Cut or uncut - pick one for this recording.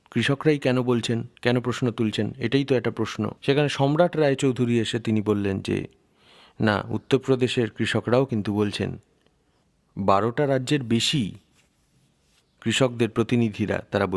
cut